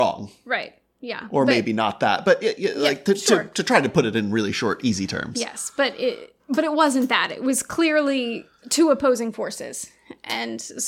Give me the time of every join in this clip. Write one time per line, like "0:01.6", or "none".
none